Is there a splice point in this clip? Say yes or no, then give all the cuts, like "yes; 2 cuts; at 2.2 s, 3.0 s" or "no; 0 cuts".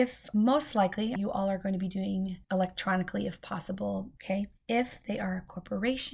yes; 3 cuts; at 1.2 s, 2.4 s, 4.2 s